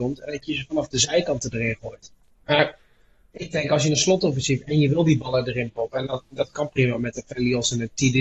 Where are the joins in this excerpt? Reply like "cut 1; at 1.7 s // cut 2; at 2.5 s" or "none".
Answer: cut 1; at 2.4 s